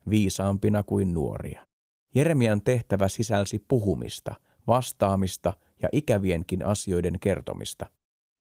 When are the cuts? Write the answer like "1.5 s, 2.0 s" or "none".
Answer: 2.0 s